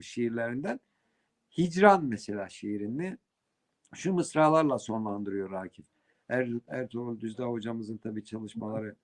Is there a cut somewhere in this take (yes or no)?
yes